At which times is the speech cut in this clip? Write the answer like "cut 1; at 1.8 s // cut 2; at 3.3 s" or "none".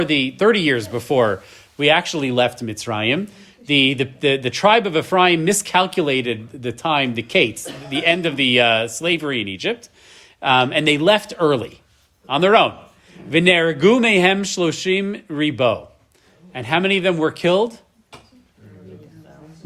none